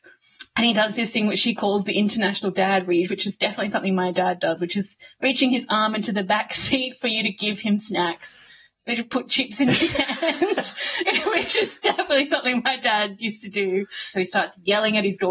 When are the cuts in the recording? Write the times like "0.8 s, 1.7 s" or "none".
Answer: 3.1 s, 14.1 s